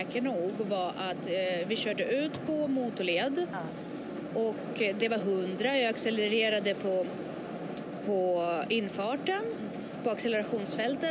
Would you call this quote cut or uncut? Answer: uncut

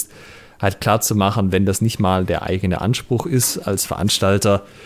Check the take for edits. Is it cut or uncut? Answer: uncut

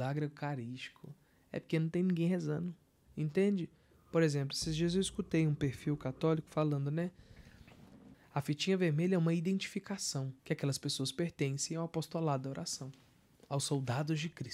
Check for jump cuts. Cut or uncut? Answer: cut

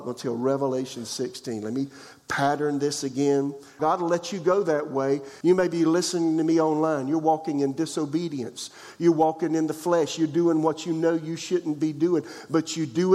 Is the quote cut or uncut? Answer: cut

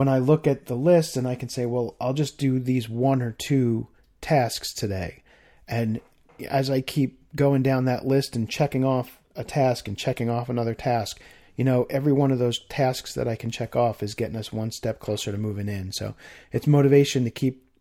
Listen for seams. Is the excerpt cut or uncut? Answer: uncut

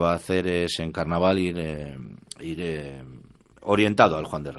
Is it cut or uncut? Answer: uncut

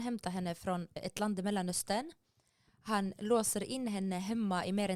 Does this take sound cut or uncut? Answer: cut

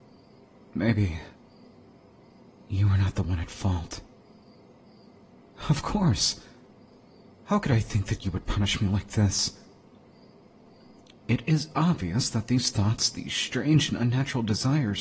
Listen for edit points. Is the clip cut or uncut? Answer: uncut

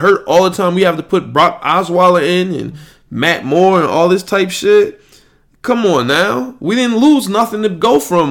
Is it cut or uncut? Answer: uncut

